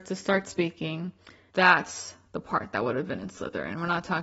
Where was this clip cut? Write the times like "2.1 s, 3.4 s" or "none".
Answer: 1.5 s